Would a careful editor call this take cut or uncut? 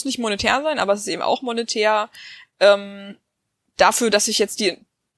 uncut